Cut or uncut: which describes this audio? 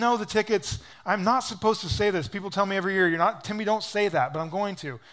uncut